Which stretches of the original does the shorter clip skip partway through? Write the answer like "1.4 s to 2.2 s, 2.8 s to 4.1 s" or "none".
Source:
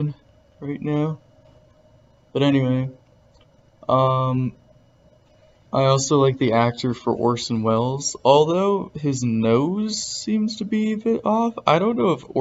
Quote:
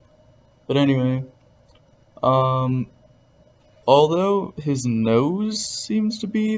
5.5 s to 8.2 s